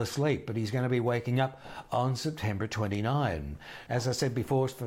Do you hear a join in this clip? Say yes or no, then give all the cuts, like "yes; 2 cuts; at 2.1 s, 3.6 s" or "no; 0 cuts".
yes; 1 cut; at 3.9 s